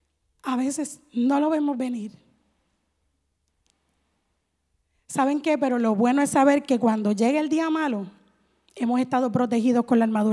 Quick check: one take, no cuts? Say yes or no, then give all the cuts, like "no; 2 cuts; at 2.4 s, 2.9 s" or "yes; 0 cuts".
yes; 0 cuts